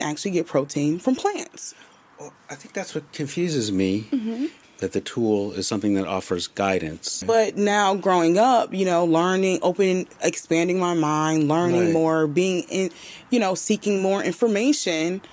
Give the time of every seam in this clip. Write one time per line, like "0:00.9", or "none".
0:04.6
0:07.2